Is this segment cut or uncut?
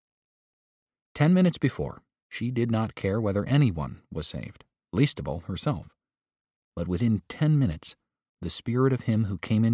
cut